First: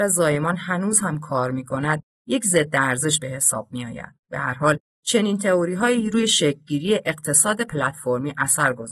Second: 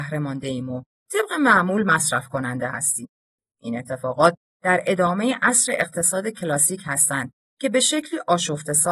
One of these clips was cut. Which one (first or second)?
first